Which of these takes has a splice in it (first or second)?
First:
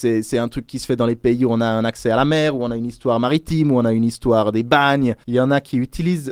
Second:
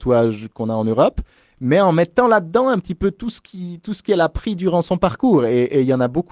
first